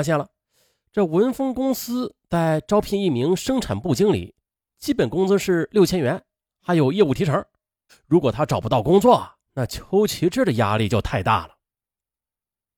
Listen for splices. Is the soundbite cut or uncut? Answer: cut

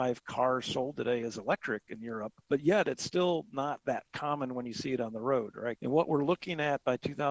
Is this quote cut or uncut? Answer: cut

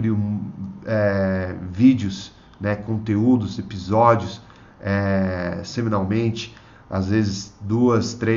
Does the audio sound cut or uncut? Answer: uncut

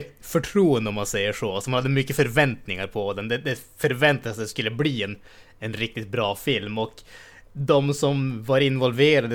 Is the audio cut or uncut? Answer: uncut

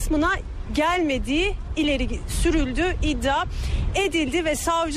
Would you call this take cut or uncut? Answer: uncut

